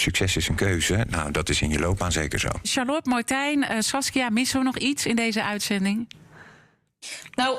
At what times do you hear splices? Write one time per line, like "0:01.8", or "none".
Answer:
0:02.6